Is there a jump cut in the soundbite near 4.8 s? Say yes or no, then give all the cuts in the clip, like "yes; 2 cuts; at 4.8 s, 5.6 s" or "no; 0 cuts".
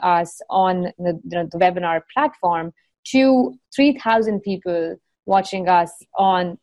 no; 1 cut; at 1.2 s